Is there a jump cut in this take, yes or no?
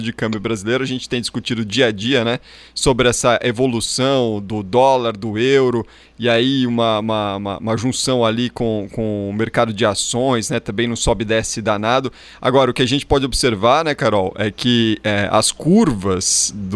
no